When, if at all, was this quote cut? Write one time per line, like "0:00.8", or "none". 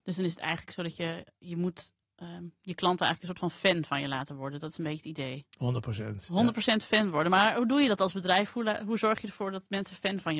none